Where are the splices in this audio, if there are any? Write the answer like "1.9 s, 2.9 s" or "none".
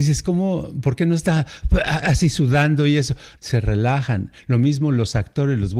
3.4 s